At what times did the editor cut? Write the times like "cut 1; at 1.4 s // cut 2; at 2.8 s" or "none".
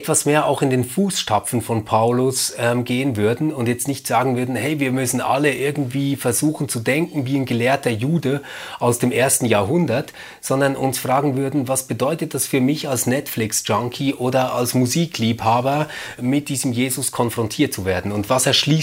cut 1; at 16.2 s